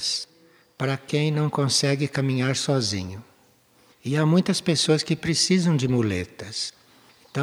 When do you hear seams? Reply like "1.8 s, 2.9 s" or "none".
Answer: none